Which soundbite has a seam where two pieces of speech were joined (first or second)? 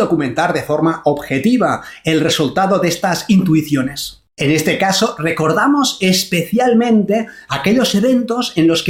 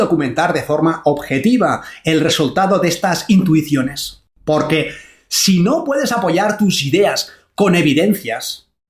first